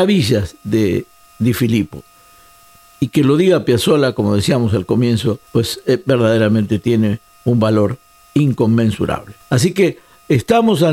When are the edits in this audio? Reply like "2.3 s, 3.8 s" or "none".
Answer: 5.5 s, 9.4 s